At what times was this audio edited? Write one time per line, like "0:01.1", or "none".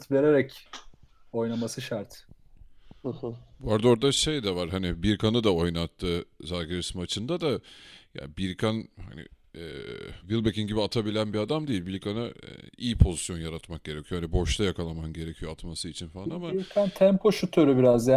0:10.2